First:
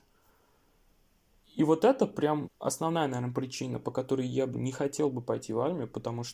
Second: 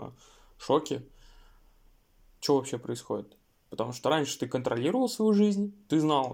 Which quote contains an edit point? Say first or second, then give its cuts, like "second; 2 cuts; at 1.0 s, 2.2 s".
first; 2 cuts; at 2.4 s, 4.5 s